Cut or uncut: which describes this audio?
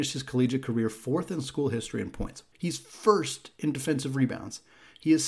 cut